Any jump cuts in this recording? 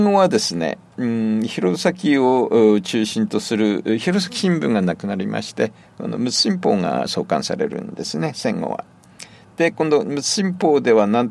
no; 0 cuts

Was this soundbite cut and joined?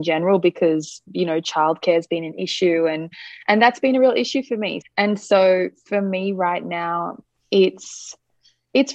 yes; 1 cut; at 4.8 s

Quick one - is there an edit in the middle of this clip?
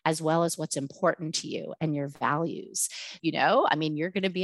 yes; 1 cut; at 3.2 s

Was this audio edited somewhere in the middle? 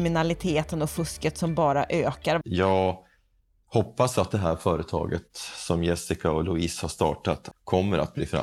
yes; 2 cuts; at 2.4 s, 7.5 s

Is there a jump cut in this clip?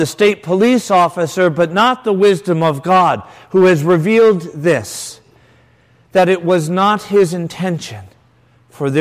no; 0 cuts

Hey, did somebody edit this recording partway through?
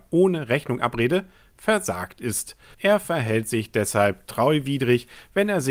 yes; 1 cut; at 2.7 s

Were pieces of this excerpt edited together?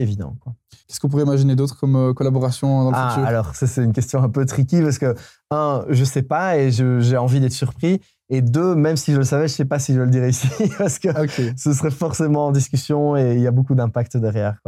no; 0 cuts

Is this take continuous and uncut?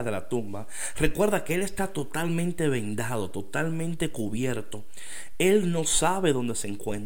yes; 0 cuts

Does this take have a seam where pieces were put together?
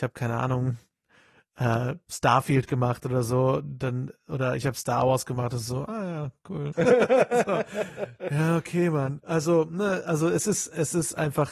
yes; 1 cut; at 6.7 s

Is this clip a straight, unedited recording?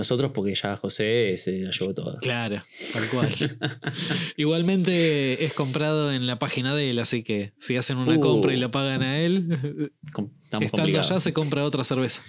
yes; 0 cuts

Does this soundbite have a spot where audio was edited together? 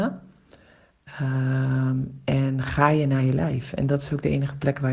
no; 0 cuts

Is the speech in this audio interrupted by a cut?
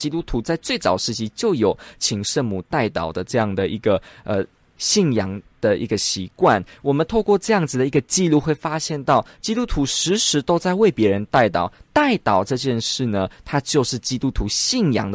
no; 0 cuts

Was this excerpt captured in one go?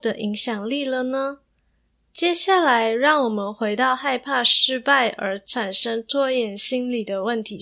yes; 0 cuts

